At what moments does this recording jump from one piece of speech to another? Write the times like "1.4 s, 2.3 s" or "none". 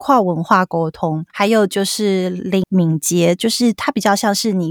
1.3 s, 2.6 s